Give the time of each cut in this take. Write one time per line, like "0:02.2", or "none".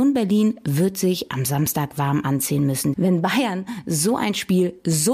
0:02.9